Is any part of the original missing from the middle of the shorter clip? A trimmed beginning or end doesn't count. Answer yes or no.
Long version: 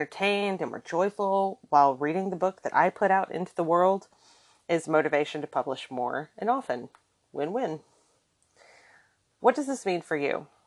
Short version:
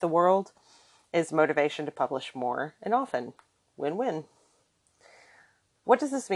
no